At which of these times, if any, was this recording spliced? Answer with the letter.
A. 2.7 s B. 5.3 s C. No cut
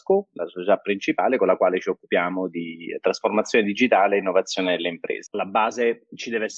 B